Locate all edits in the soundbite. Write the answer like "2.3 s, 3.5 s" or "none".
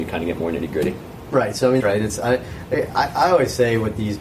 1.8 s